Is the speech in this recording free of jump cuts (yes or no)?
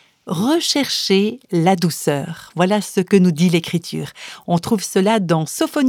yes